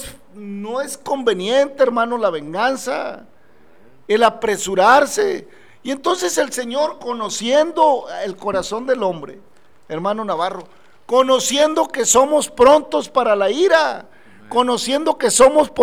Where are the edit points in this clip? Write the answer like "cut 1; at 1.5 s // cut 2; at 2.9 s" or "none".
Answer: none